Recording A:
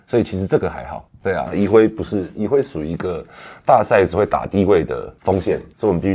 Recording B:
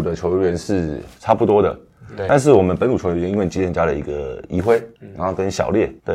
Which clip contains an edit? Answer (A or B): A